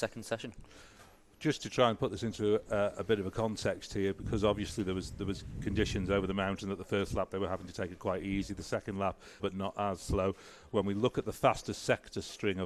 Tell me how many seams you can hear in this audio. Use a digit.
1